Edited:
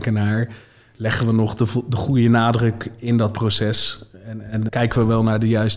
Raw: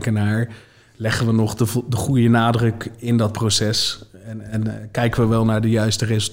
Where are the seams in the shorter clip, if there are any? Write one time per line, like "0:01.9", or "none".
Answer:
0:04.7